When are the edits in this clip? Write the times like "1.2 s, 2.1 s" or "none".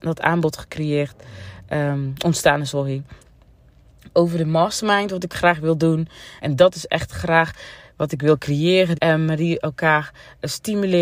6.4 s, 9.0 s